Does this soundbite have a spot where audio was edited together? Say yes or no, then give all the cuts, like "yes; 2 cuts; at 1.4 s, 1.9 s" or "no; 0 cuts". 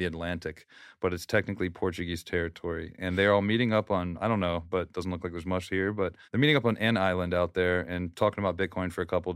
yes; 2 cuts; at 4.7 s, 6.2 s